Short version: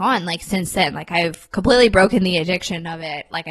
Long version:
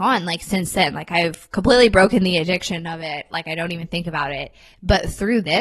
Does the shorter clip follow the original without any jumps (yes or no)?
yes